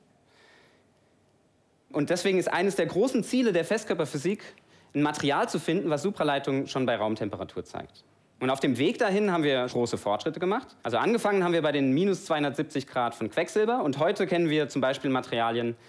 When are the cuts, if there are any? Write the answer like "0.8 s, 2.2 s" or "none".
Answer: 9.7 s, 10.8 s

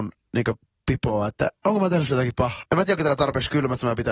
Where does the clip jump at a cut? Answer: 2.6 s

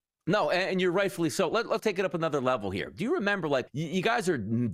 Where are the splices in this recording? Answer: 1.8 s, 3.7 s

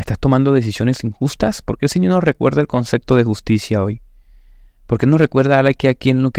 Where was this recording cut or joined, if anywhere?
none

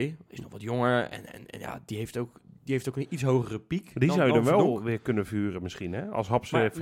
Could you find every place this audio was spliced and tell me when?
none

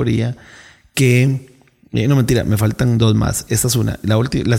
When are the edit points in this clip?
none

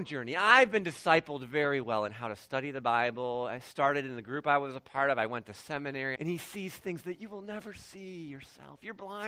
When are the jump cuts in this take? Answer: 6.2 s

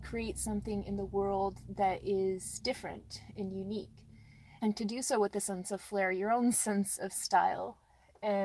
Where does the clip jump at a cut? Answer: 4.6 s

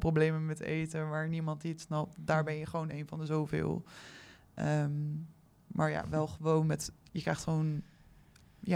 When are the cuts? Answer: none

